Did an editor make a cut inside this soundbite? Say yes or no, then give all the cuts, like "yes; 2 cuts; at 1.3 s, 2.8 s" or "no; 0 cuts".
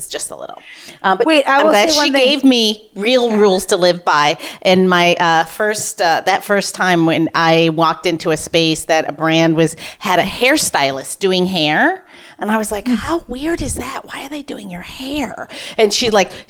no; 0 cuts